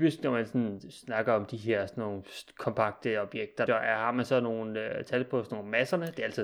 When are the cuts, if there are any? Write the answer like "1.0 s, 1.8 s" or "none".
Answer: 3.7 s